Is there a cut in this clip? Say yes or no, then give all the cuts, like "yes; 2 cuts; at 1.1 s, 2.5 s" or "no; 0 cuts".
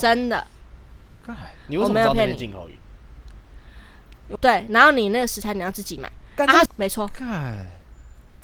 yes; 2 cuts; at 4.4 s, 6.7 s